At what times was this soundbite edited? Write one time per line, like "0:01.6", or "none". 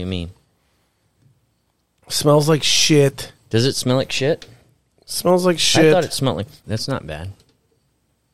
0:06.6